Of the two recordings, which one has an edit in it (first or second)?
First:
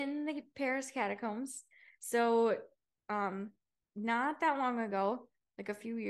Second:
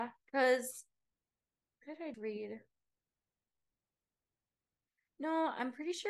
second